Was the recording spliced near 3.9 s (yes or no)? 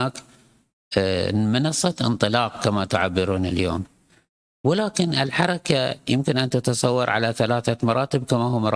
no